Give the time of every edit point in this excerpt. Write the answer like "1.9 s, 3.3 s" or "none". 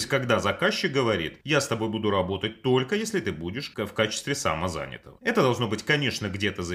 none

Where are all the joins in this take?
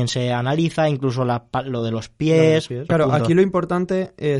2.9 s

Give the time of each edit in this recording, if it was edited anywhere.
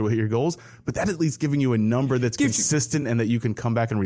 none

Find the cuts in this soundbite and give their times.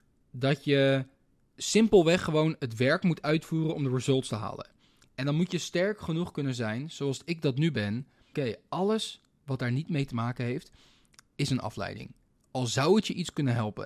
8.3 s

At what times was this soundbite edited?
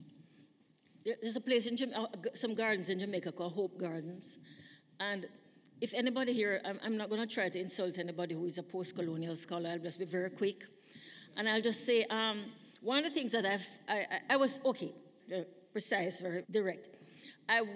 15.2 s, 16.4 s

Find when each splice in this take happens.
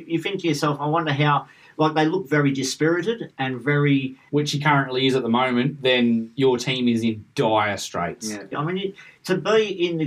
4.3 s, 8.5 s

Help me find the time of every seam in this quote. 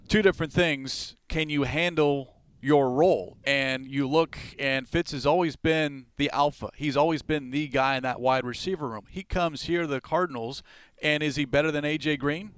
none

